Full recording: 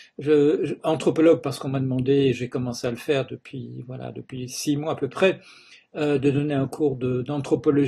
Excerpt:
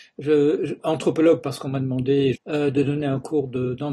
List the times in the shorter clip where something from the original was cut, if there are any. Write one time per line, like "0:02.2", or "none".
0:02.4